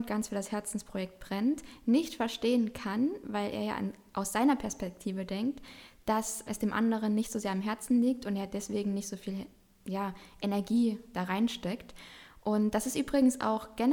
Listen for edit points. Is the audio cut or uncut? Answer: cut